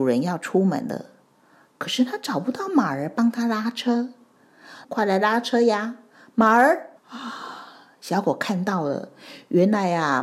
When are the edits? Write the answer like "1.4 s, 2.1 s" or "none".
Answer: 4.8 s, 7.0 s